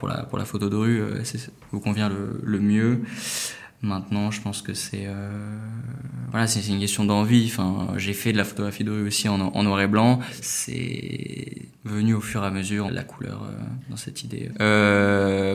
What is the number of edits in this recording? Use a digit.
2